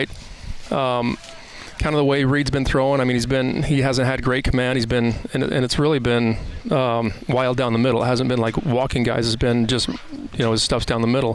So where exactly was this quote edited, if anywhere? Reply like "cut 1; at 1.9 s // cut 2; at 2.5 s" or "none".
none